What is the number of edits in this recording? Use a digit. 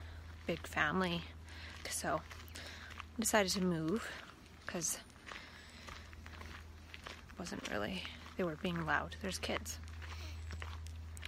1